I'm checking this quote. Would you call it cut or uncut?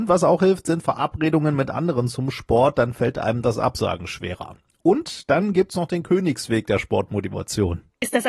uncut